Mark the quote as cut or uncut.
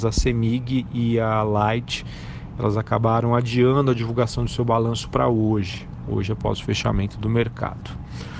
uncut